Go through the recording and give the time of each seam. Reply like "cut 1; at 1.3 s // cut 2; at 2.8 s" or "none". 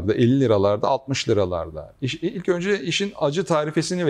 none